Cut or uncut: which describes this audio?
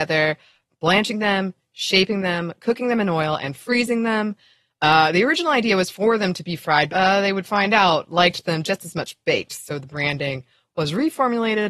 cut